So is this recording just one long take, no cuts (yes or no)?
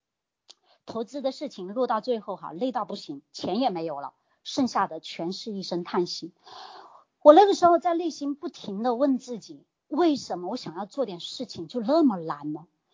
yes